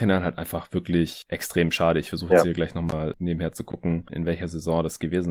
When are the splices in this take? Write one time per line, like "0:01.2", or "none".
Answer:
0:04.1